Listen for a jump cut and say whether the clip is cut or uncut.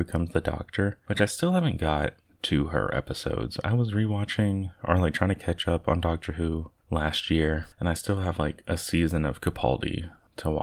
uncut